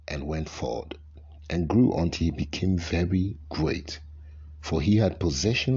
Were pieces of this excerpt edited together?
no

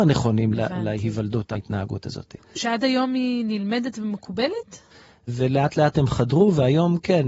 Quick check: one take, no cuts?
no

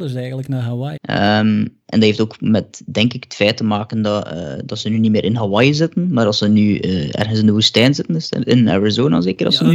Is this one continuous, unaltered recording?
no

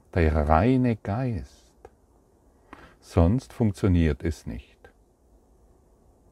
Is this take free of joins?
yes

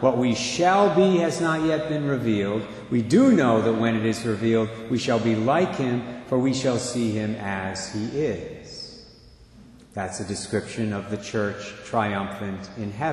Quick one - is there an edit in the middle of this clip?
no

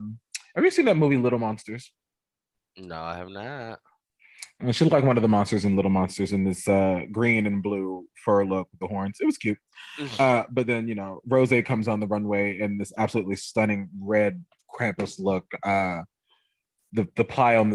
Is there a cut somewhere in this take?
no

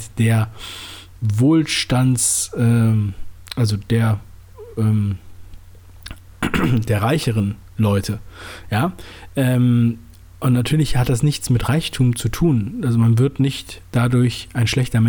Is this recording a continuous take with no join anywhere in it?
yes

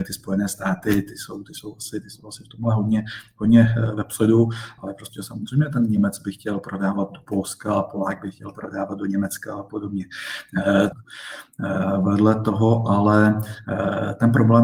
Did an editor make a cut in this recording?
yes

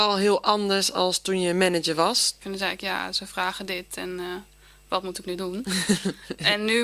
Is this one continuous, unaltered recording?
no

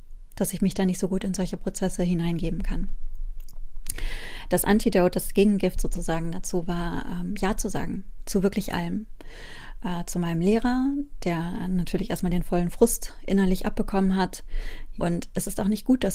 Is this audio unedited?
no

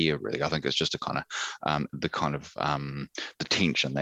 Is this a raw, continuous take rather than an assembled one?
no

